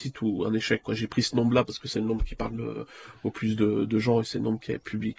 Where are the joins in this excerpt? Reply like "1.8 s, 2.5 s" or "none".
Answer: none